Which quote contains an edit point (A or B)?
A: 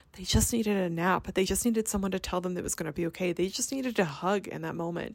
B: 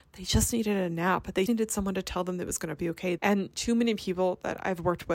B